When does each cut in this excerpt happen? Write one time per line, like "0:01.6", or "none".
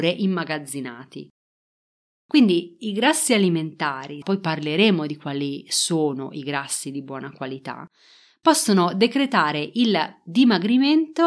0:04.2

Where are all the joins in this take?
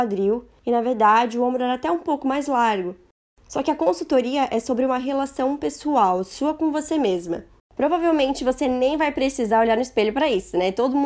0:07.6

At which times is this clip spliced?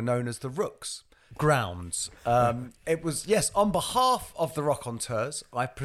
0:01.3

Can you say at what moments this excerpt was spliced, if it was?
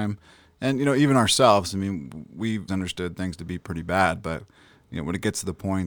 0:02.7

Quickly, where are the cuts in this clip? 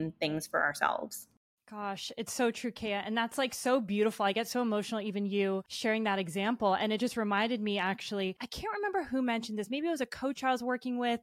none

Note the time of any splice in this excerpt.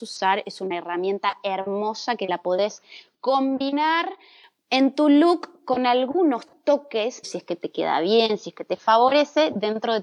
0:07.2

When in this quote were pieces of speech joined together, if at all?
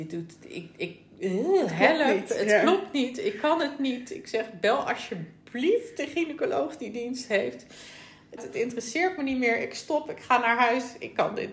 0:08.4

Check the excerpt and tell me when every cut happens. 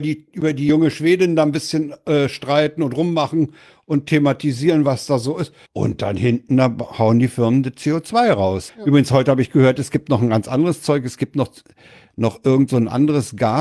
0:05.6
0:08.7

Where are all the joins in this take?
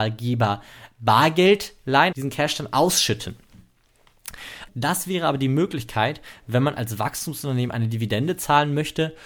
0:02.1
0:04.7

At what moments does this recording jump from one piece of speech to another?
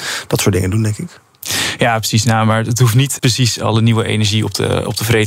0:03.2

